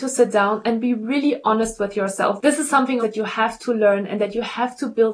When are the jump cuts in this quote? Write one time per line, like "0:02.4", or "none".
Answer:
0:03.0